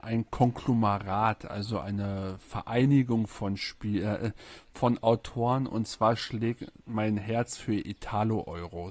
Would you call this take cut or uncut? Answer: uncut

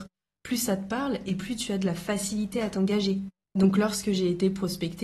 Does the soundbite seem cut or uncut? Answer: cut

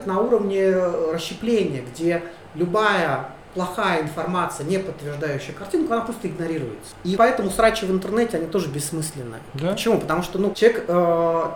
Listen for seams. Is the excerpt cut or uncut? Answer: cut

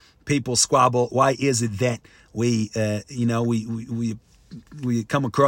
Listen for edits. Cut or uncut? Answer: uncut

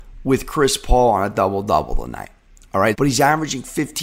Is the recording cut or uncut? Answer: cut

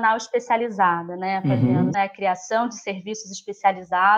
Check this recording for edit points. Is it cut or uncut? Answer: cut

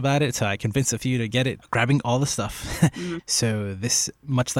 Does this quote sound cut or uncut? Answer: cut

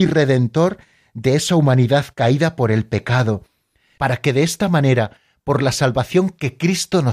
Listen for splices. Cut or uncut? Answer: uncut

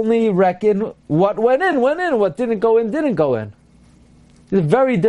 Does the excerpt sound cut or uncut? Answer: uncut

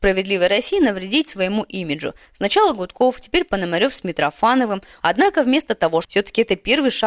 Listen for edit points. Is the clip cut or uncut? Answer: cut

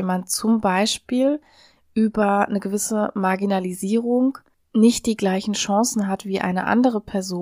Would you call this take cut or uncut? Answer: uncut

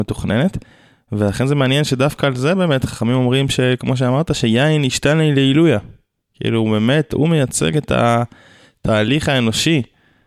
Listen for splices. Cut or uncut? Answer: uncut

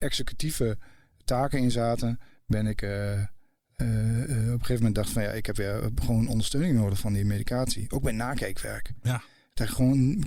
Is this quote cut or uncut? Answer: uncut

